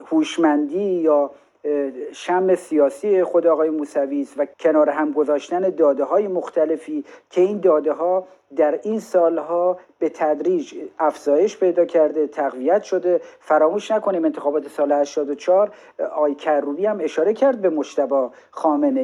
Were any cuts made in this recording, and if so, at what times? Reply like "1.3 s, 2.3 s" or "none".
4.5 s